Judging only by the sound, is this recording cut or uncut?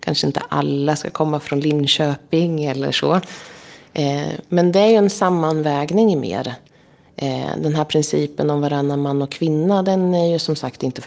uncut